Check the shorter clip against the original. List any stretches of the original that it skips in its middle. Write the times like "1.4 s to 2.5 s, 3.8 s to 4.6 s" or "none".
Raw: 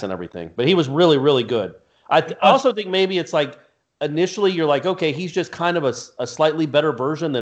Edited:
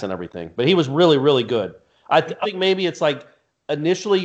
2.4 s to 2.7 s